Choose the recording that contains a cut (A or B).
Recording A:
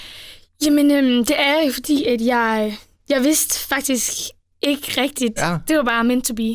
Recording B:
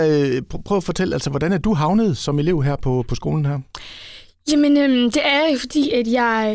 A